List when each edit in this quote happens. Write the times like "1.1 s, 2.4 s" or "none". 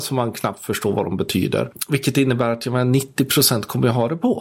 none